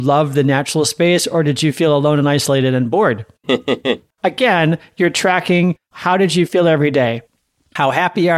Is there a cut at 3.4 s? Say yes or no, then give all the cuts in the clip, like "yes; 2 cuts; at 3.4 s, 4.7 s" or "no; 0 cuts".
yes; 1 cut; at 3.4 s